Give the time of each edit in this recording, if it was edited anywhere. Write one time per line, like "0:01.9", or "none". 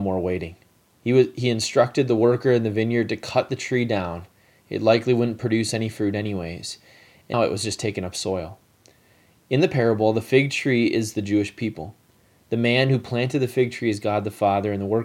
0:07.3